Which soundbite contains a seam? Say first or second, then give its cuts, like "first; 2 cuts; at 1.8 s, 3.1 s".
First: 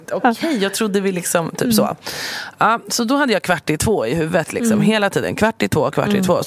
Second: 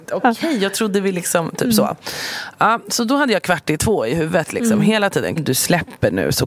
second; 1 cut; at 5.4 s